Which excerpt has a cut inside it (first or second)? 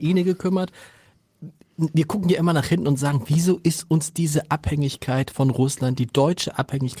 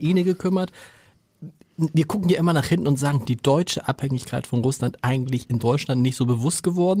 second